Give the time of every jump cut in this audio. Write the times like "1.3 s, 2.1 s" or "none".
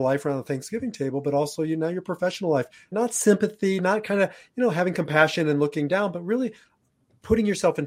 2.9 s